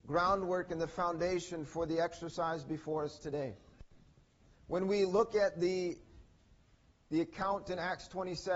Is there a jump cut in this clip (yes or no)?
no